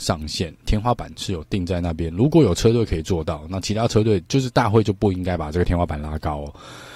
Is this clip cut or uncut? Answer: uncut